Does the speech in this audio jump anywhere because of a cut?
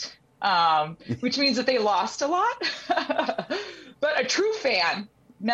no; 0 cuts

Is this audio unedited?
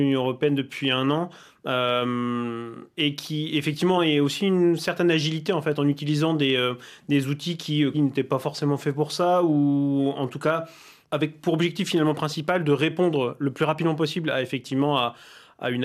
no; 3 cuts; at 4.0 s, 7.9 s, 11.0 s

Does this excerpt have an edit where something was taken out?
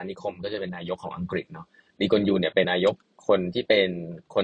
yes; 1 cut; at 2.6 s

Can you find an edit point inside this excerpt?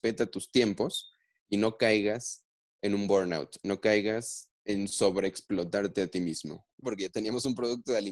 yes; 2 cuts; at 4.6 s, 6.8 s

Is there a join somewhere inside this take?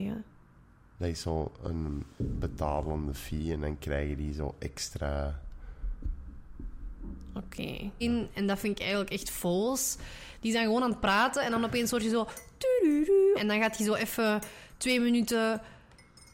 yes; 2 cuts; at 8.0 s, 13.4 s

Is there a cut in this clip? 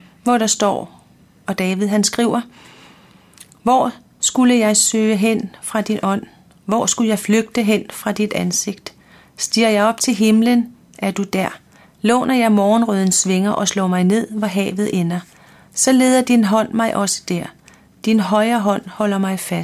yes; 1 cut; at 11.8 s

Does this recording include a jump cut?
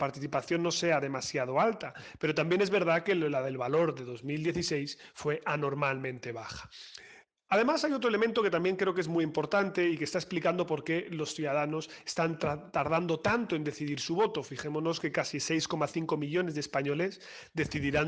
no; 0 cuts

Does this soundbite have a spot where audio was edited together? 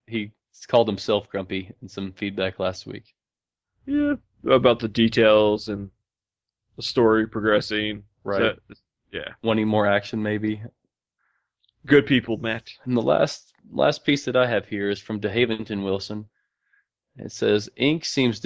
no; 0 cuts

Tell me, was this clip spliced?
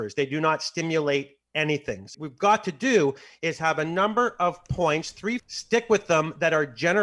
yes; 2 cuts; at 2.1 s, 5.4 s

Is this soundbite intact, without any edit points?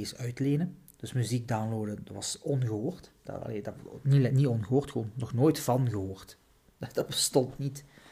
no; 1 cut; at 1.0 s

